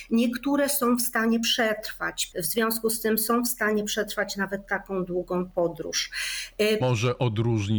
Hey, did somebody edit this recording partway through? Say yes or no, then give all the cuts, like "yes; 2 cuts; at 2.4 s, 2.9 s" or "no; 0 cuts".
yes; 2 cuts; at 2.3 s, 6.8 s